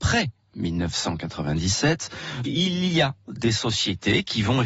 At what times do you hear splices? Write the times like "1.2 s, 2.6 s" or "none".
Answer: 2.4 s